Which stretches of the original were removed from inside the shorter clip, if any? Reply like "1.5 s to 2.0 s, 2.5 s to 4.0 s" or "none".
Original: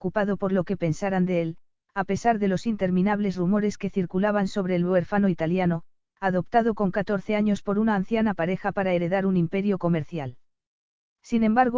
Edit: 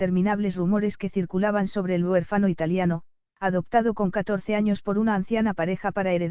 none